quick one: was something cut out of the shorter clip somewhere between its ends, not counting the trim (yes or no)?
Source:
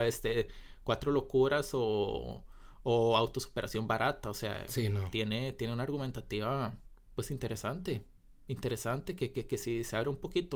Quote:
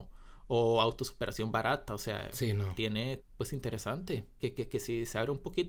yes